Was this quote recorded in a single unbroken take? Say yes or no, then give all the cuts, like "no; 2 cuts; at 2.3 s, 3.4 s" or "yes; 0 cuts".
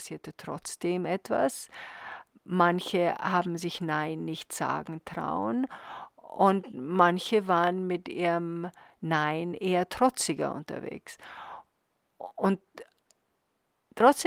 yes; 0 cuts